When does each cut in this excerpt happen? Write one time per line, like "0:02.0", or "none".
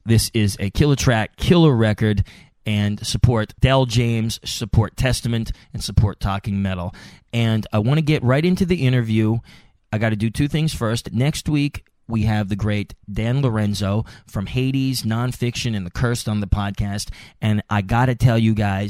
none